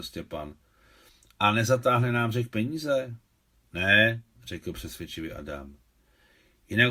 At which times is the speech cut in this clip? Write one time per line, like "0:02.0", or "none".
none